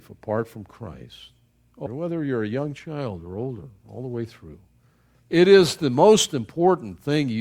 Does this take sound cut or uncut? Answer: cut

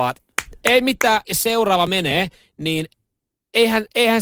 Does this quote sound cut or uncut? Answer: cut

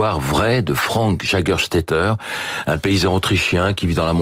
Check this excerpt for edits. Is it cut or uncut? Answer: uncut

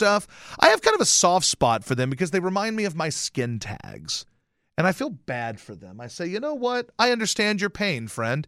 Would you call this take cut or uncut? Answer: uncut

